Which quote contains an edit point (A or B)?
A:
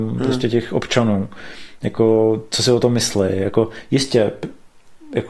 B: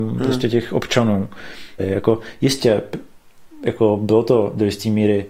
B